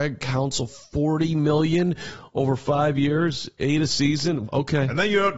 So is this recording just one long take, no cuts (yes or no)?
no